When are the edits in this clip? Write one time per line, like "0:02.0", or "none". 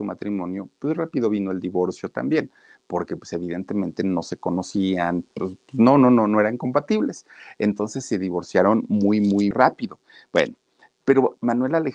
0:09.5